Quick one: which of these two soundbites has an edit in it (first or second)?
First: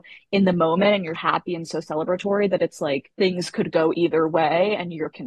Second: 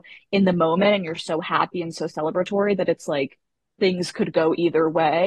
first